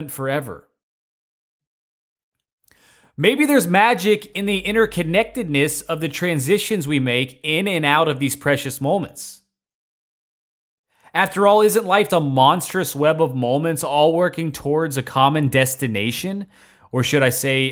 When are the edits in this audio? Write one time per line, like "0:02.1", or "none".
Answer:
0:12.1